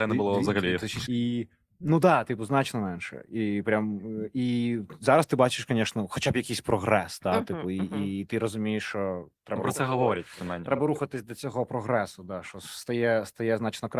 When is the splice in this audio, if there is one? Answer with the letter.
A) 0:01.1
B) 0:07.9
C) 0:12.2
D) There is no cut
A